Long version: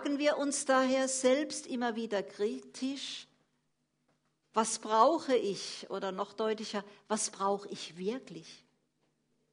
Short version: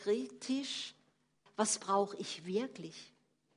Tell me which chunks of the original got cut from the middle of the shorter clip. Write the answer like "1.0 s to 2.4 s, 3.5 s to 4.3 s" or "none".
3.8 s to 7.0 s